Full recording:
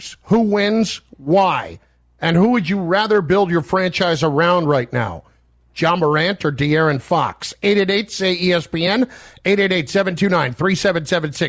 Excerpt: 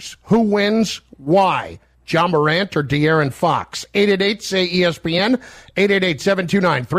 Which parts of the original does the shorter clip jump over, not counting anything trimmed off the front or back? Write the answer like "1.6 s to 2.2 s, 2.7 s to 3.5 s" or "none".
1.9 s to 5.6 s